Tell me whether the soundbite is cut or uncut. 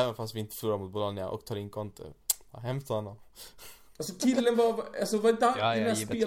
uncut